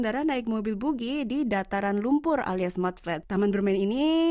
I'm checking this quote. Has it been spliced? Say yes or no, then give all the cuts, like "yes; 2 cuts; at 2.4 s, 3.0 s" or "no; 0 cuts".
yes; 1 cut; at 3.2 s